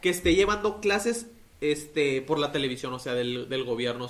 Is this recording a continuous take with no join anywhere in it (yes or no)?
yes